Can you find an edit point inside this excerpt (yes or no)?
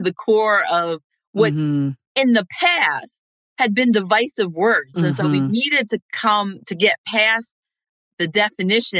yes